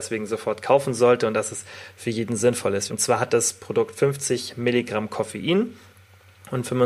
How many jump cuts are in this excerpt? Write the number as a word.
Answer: one